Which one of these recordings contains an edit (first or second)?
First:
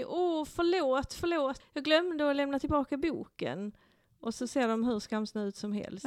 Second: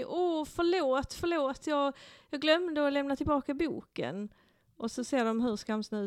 first